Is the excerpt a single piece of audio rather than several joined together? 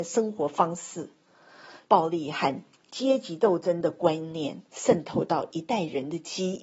no; 2 cuts; at 1.8 s, 4.7 s

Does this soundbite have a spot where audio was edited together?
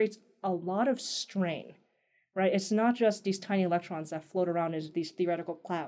no; 0 cuts

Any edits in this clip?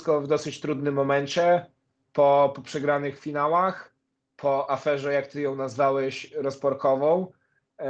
no; 0 cuts

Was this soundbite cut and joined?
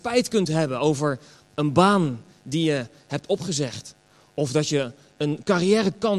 no; 0 cuts

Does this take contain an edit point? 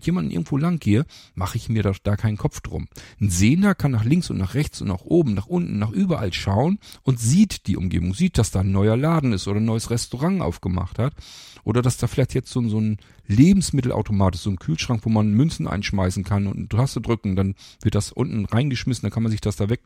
no; 0 cuts

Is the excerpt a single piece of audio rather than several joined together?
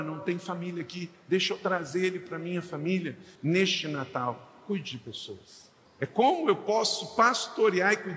no; 2 cuts; at 3.4 s, 5.9 s

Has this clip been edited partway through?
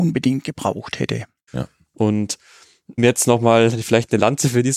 yes; 2 cuts; at 1.5 s, 3.0 s

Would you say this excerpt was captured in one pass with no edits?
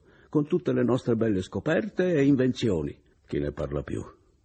no; 1 cut; at 3.1 s

